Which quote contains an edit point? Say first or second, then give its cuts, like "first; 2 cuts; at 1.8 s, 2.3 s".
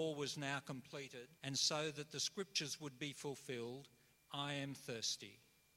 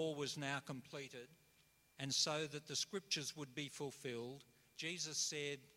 first; 2 cuts; at 1.4 s, 4.2 s